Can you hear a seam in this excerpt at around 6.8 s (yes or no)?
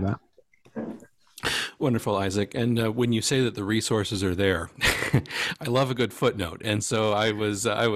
no